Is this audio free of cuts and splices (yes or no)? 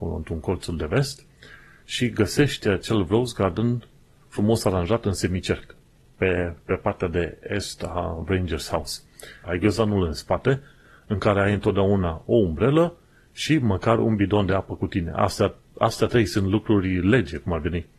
no